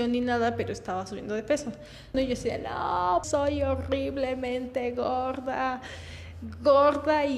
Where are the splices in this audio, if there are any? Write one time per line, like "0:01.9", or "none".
0:02.1
0:03.2